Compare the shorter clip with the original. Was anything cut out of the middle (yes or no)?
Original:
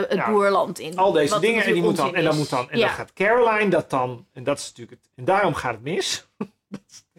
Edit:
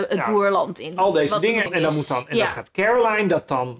yes